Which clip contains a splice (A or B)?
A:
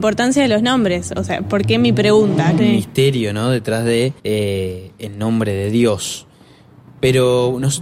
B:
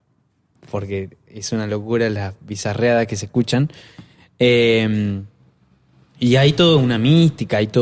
A